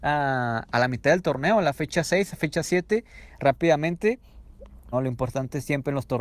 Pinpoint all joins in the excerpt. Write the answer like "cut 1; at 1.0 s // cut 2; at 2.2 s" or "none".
cut 1; at 4.9 s